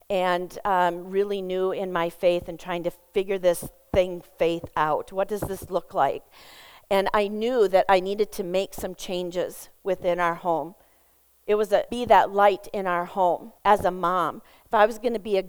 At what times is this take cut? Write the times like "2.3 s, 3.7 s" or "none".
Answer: 11.9 s, 13.6 s